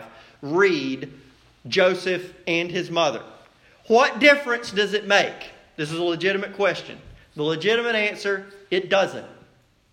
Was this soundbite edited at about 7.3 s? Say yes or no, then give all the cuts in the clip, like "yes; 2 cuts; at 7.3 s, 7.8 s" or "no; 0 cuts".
no; 0 cuts